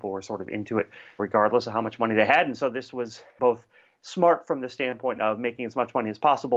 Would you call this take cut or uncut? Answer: uncut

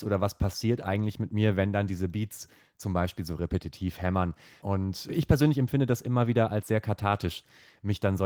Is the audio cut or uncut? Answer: uncut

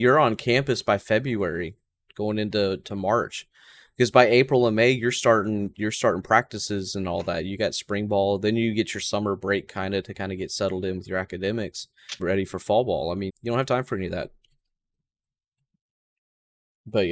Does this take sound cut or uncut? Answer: cut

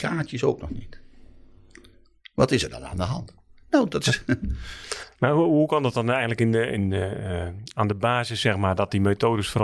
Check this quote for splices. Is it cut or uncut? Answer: uncut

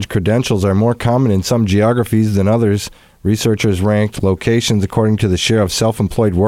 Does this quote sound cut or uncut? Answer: uncut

